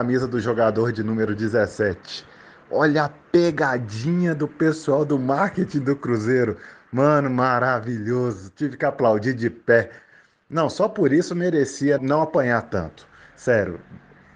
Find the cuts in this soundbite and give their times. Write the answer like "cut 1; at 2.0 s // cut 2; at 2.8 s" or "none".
cut 1; at 12.0 s